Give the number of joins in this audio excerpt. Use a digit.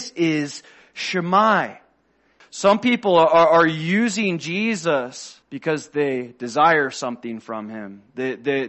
2